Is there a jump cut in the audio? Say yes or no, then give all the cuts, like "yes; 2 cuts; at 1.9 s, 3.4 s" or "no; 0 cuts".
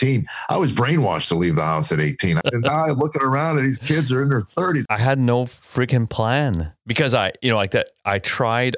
yes; 2 cuts; at 2.4 s, 4.9 s